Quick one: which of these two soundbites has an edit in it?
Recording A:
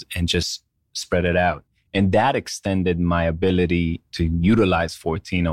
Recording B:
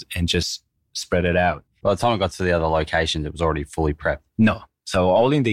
B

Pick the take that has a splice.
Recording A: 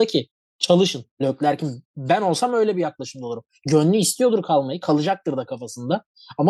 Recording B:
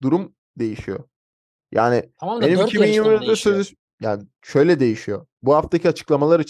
A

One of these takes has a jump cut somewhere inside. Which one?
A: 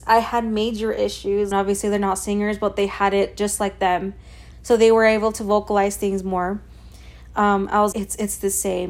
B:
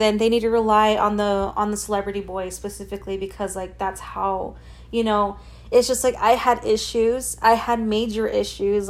A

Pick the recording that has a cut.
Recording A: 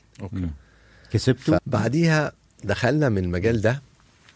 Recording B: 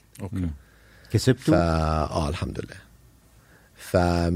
A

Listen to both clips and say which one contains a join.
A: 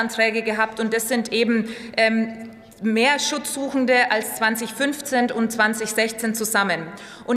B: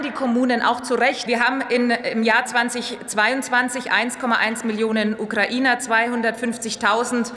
B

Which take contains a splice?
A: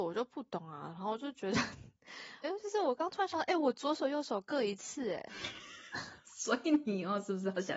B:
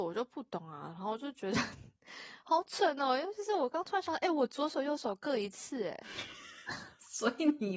A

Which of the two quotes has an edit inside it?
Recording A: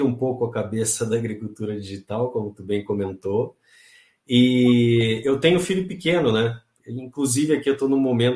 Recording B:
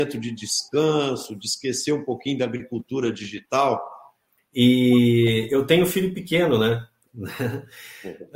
B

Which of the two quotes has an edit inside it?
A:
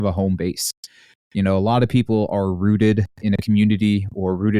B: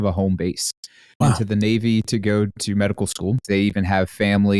B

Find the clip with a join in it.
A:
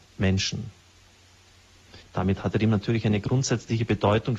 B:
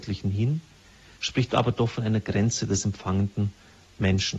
A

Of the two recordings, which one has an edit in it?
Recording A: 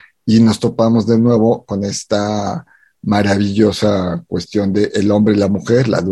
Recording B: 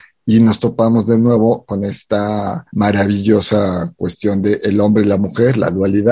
B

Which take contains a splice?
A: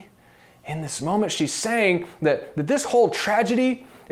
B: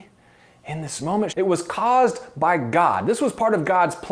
B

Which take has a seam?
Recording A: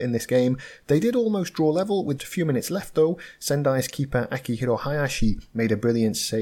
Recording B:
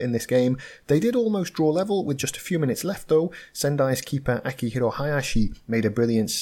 A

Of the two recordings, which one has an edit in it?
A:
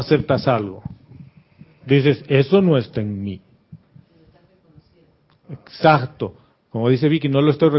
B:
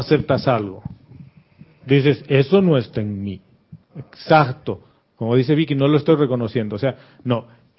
B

